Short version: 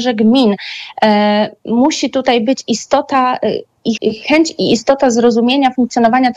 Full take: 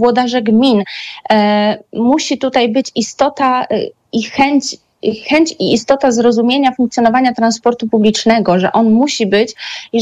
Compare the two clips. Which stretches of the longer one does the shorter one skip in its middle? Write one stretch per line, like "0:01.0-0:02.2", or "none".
0:04.2-0:05.0

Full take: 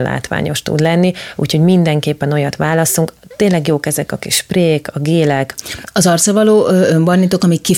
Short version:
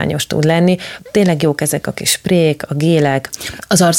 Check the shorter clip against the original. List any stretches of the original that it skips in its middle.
0:01.3-0:03.2

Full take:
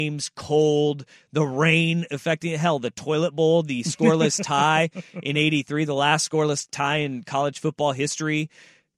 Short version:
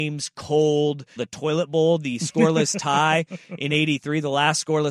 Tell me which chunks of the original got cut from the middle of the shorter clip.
0:01.2-0:02.8

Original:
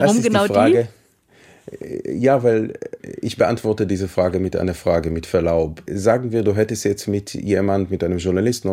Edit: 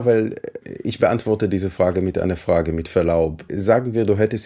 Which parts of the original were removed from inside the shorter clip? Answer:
none

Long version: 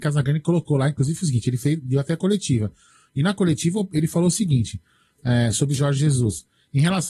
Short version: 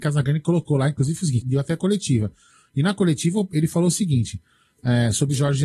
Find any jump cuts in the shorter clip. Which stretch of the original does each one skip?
0:01.4-0:01.8

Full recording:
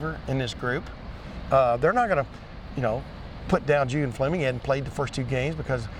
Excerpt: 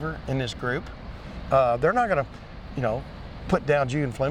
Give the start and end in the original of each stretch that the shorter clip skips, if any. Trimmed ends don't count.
none

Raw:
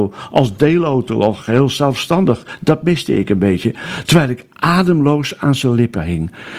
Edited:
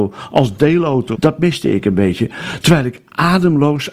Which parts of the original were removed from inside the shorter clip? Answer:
0:01.1-0:02.6

